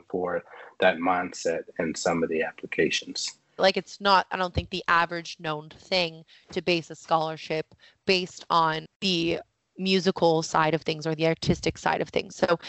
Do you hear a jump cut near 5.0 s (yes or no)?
no